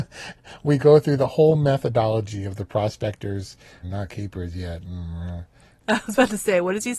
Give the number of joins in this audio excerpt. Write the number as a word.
two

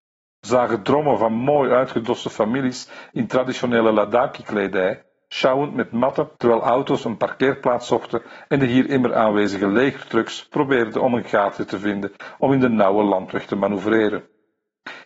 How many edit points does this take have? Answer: one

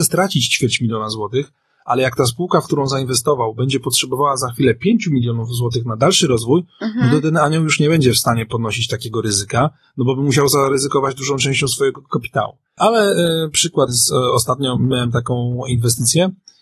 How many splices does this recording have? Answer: two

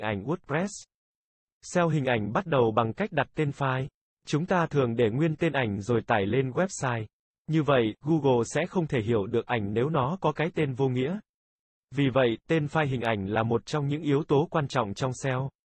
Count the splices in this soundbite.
zero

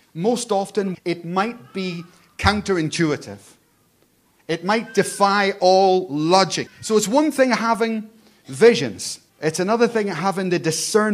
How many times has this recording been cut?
three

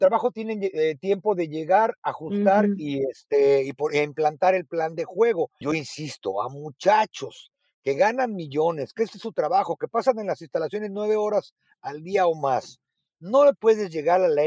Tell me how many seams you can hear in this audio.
one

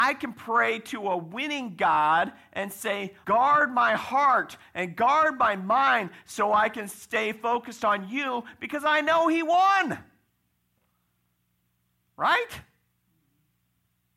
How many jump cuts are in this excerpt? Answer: one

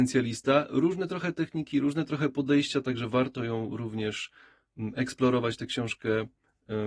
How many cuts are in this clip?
zero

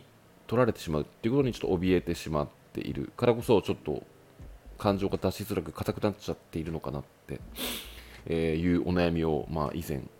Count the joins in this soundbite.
zero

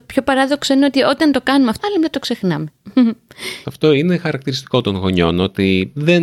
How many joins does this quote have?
two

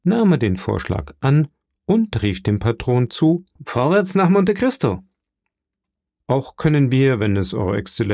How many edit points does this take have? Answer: two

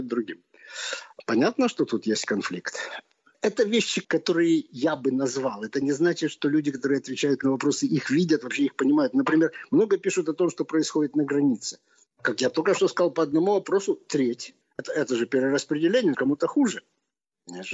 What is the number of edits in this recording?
three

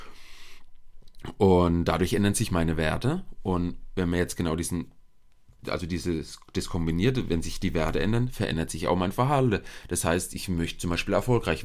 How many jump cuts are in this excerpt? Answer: zero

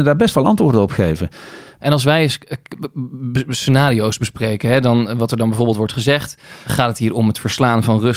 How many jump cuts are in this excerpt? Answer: two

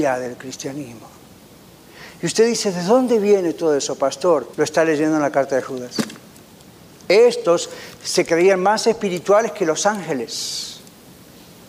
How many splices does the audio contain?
one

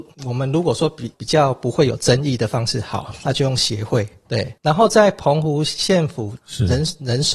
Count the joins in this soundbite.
two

